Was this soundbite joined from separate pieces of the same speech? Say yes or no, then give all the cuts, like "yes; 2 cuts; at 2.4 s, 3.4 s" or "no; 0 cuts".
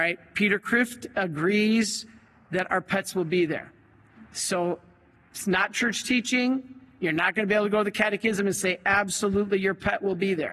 no; 0 cuts